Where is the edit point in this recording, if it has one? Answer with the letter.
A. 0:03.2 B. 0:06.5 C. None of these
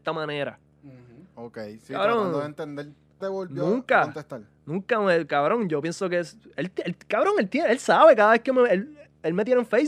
A